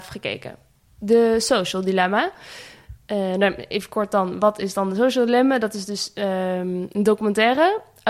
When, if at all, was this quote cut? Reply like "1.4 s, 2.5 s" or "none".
none